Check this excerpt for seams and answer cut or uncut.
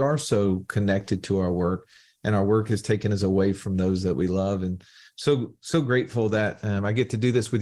uncut